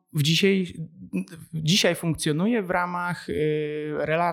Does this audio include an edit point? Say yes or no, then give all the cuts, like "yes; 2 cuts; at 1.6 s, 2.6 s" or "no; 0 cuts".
no; 0 cuts